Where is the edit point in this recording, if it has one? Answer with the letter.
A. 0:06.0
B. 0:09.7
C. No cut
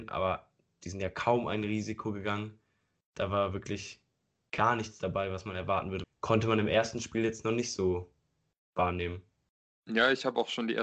A